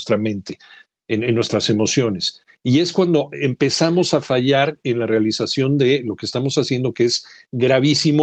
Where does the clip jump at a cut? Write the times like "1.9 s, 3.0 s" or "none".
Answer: none

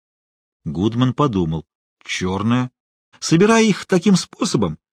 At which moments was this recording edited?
3.1 s

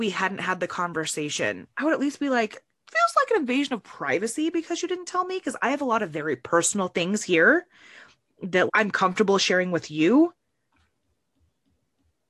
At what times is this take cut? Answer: 1.7 s, 8.7 s

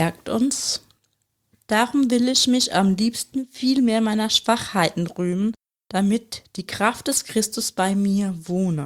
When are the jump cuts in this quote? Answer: 1.5 s

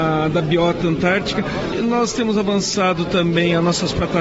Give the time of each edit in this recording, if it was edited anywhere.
1.7 s

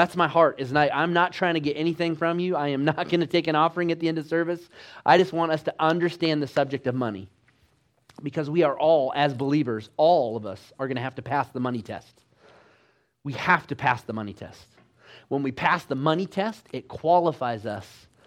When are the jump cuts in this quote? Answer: none

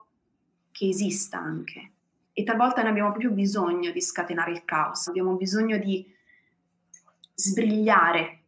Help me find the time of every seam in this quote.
2.3 s, 5.1 s

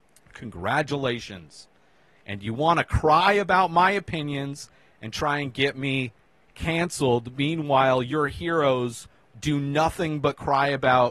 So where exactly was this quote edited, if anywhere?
none

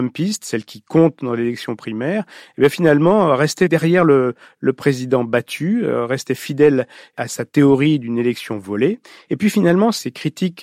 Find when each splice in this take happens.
9.3 s

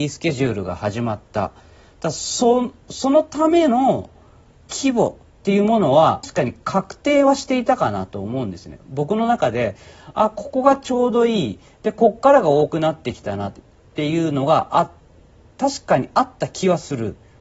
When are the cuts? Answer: 6.2 s

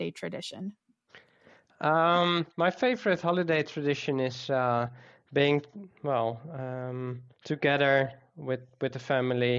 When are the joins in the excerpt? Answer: 7.3 s

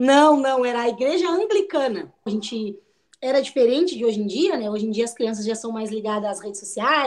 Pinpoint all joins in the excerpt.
2.3 s

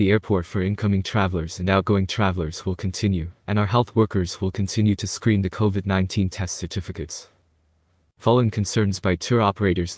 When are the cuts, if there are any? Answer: none

